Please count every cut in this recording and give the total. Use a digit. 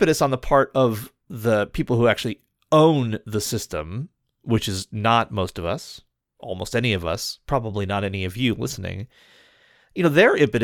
0